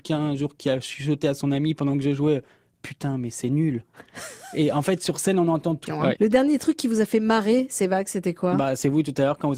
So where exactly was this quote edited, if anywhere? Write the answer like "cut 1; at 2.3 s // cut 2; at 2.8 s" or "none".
cut 1; at 5.9 s